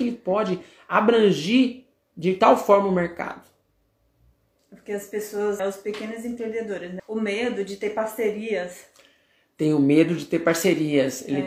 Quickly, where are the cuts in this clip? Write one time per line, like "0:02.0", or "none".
0:05.6
0:07.0